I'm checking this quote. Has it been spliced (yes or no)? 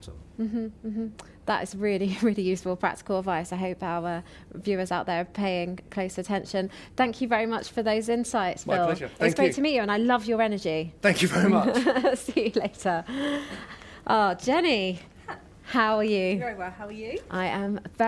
no